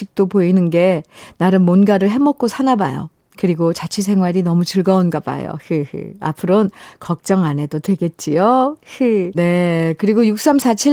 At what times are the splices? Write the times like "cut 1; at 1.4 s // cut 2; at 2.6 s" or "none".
cut 1; at 9.3 s